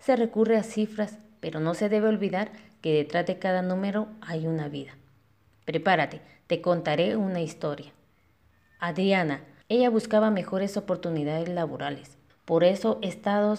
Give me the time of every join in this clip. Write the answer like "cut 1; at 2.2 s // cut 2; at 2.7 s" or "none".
cut 1; at 9.6 s // cut 2; at 12.3 s